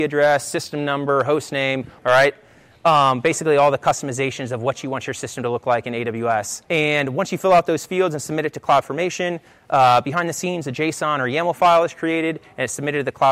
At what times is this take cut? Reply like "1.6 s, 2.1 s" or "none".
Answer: 2.0 s, 6.6 s

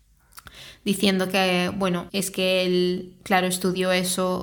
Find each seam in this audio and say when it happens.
2.1 s

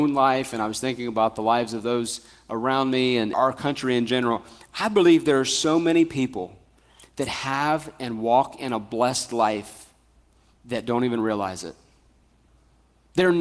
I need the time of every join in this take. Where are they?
3.3 s

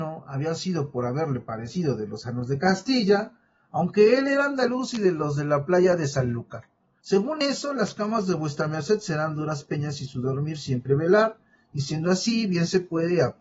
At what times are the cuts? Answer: 7.0 s

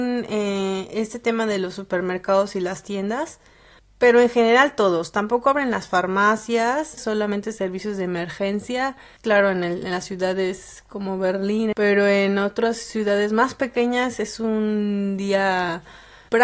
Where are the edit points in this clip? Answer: 7.0 s, 9.2 s, 11.7 s

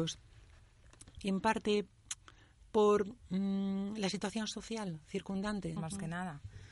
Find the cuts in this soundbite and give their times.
1.1 s, 5.8 s

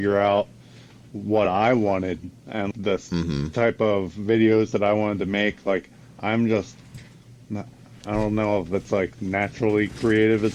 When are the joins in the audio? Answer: 2.7 s

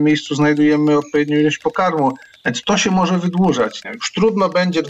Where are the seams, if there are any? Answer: 3.8 s

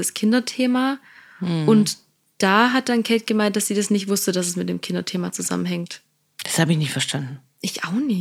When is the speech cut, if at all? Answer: none

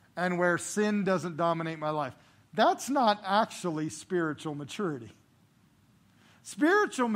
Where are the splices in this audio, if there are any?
none

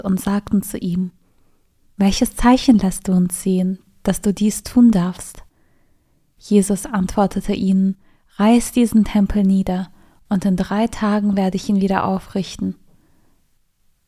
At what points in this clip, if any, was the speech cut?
none

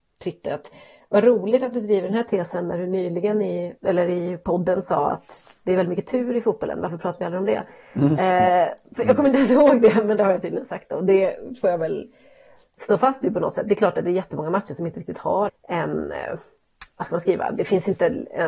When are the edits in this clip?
3.8 s, 15.5 s

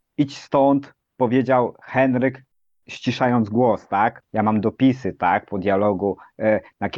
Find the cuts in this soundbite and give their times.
4.2 s

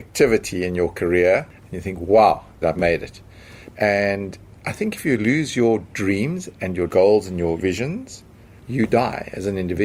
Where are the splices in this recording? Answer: 2.6 s, 3.7 s

